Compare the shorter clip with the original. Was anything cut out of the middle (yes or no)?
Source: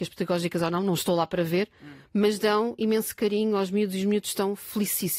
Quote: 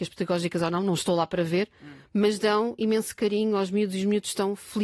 no